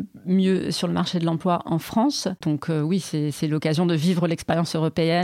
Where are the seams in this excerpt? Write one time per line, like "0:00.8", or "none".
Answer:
0:02.4